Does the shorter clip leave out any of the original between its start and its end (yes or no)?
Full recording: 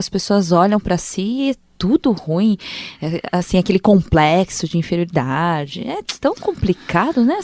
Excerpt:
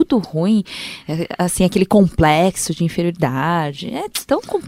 no